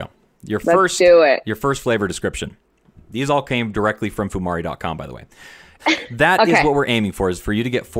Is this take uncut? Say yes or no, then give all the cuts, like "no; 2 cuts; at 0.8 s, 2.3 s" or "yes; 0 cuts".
no; 1 cut; at 5.8 s